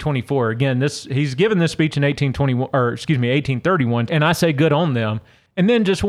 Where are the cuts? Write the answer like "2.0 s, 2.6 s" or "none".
4.1 s